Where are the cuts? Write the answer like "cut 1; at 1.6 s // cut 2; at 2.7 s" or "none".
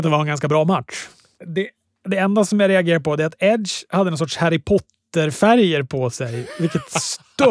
cut 1; at 1.3 s